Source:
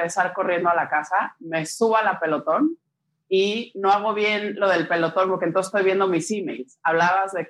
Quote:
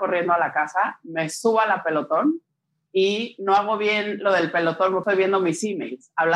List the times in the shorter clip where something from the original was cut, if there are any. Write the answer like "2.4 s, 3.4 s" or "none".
5.0 s